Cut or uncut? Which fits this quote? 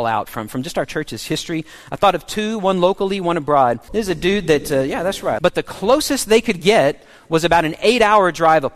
cut